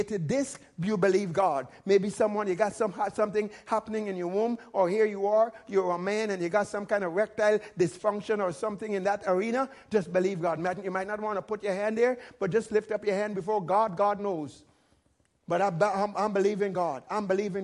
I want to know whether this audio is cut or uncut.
uncut